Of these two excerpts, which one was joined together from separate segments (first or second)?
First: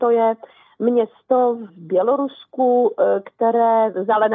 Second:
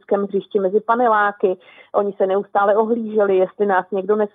first